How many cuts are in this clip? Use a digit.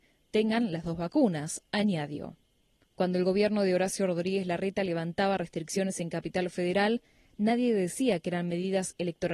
1